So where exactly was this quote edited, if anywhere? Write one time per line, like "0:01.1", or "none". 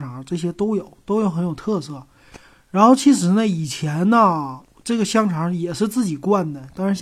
none